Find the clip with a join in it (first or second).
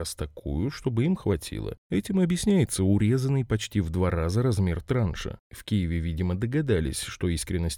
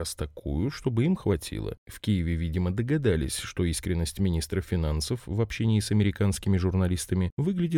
second